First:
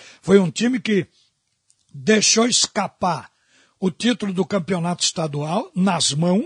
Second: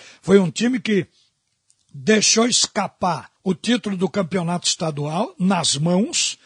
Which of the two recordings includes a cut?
second; 1 cut; at 3.4 s

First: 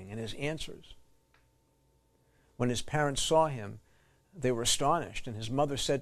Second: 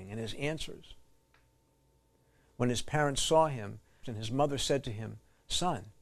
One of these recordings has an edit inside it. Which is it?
second; 1 cut; at 4.0 s

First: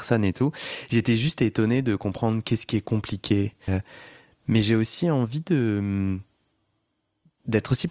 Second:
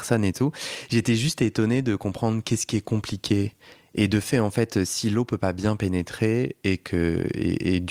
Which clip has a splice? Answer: first; 1 cut; at 3.7 s

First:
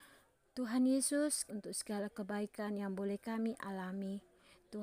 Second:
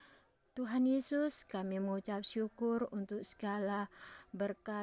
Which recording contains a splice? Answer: first; 1 cut; at 1.5 s

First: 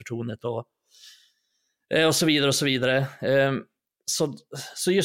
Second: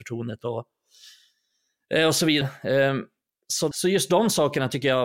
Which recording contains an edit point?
second; 2 cuts; at 2.4 s, 3.7 s

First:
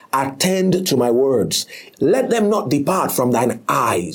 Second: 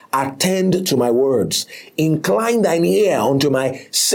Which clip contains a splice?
first; 1 cut; at 1.9 s

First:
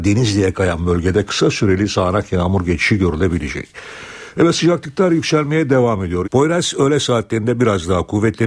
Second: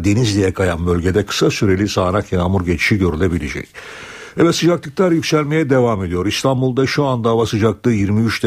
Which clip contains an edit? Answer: first; 1 cut; at 6.2 s

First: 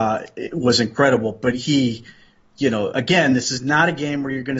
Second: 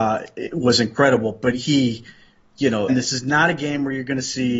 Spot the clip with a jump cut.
second; 1 cut; at 2.9 s

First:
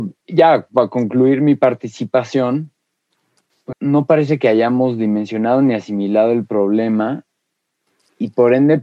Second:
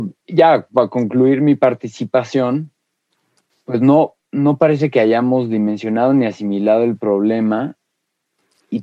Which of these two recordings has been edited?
first; 1 cut; at 3.7 s

